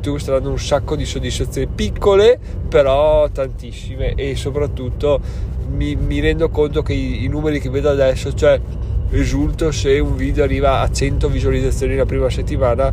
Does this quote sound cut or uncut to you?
uncut